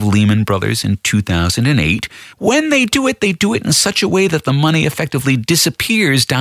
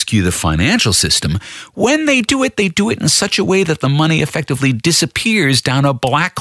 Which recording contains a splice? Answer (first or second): first